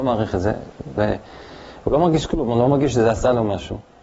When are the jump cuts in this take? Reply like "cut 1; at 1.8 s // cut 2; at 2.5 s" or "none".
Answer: cut 1; at 1.0 s